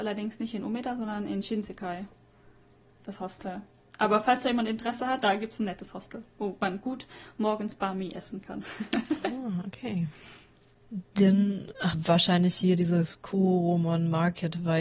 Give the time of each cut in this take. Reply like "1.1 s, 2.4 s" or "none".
5.2 s, 11.9 s